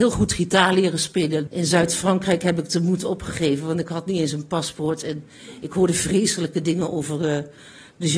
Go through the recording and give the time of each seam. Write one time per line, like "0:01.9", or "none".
0:01.5